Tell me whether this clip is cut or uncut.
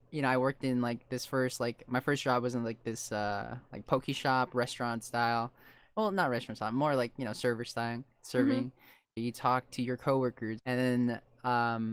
cut